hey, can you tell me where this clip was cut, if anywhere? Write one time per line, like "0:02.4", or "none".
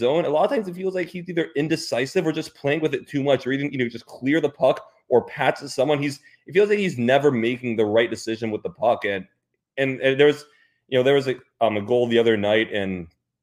none